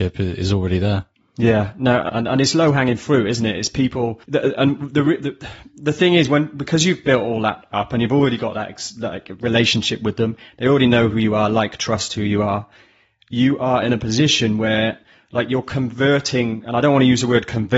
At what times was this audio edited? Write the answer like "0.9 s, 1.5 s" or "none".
2.1 s, 4.2 s